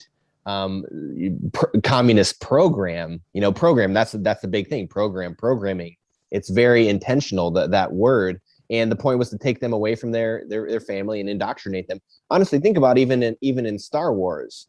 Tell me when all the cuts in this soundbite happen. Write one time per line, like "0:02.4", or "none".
0:03.3